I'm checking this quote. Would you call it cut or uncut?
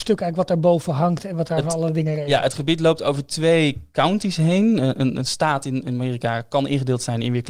uncut